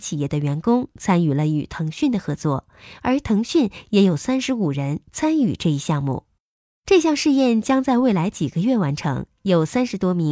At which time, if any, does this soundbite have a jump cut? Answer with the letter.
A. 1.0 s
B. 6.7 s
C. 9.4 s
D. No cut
B